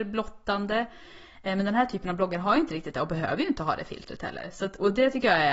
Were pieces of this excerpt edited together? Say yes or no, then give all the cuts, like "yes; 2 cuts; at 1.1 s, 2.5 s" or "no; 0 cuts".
no; 0 cuts